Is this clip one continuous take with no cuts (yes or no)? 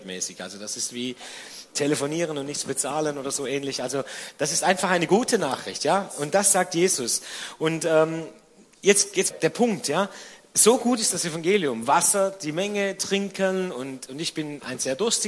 no